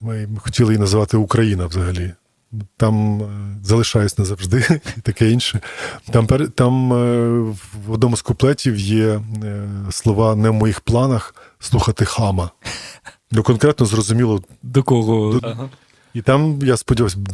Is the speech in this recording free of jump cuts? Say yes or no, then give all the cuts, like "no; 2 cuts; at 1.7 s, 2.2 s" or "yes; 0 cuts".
no; 2 cuts; at 13.2 s, 15.4 s